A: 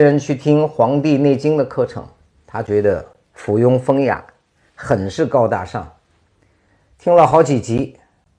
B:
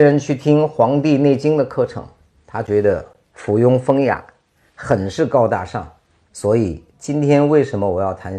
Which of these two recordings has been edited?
B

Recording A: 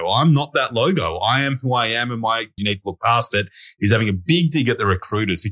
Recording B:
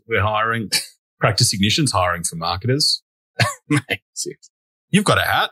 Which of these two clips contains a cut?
A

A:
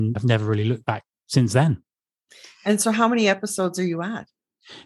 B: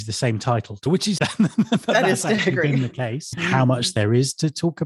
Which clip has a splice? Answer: B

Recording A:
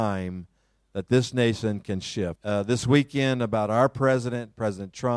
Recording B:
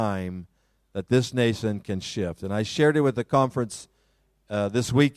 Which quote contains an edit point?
A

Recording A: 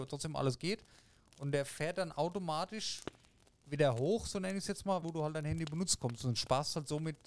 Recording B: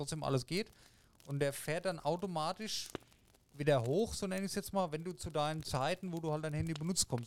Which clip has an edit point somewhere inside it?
A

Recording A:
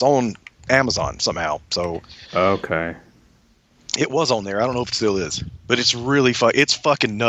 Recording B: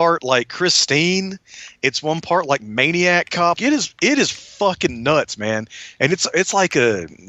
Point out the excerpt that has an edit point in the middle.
B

